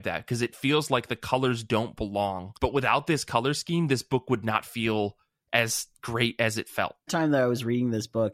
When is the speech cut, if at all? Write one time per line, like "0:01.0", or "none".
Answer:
0:02.6
0:07.1